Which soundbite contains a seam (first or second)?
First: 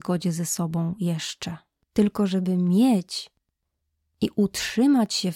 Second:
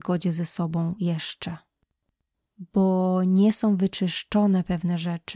first